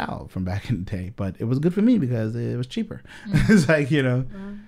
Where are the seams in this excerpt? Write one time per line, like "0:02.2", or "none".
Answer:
none